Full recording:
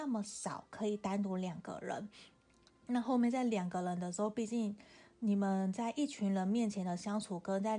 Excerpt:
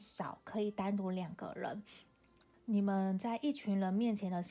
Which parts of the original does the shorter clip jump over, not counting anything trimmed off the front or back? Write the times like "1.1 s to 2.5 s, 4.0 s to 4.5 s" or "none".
2.8 s to 5.1 s